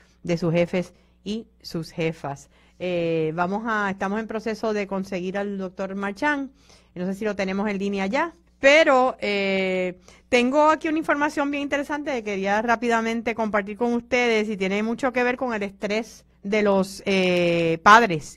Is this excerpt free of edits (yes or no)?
no